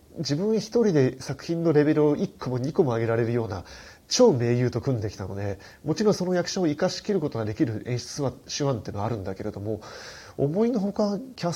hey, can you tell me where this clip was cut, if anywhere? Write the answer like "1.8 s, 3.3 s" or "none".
none

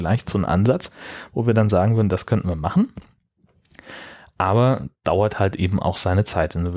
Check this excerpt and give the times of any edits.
none

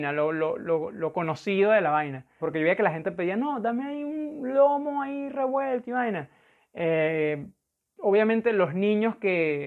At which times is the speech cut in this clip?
2.4 s, 6.6 s

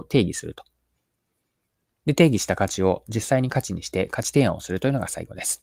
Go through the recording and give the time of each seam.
none

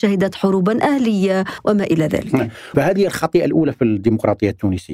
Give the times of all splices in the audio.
2.7 s

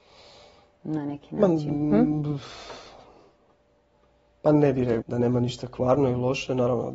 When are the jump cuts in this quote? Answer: 5.0 s

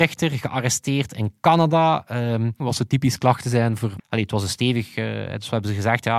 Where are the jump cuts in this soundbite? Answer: 2.6 s, 4.0 s

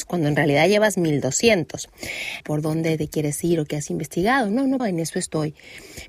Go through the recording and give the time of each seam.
2.4 s, 4.8 s

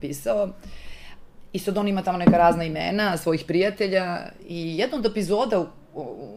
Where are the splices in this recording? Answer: none

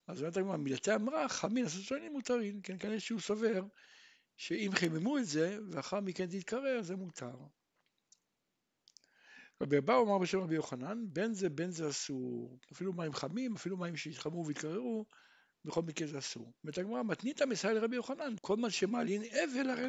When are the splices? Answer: 16.6 s, 18.4 s

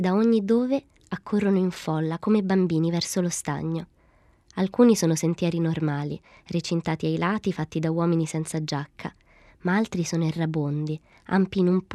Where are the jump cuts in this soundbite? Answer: none

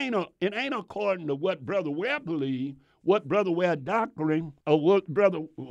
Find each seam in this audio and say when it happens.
4.6 s

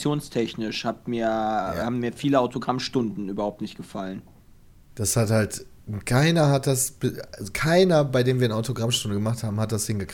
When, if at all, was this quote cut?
none

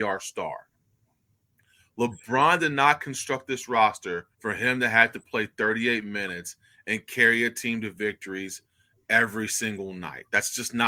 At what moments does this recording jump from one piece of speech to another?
4.3 s

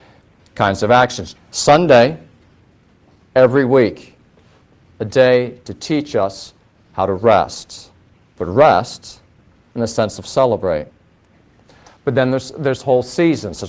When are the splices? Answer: 1.3 s

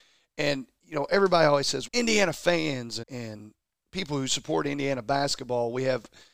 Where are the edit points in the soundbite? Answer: 1.9 s, 3.0 s

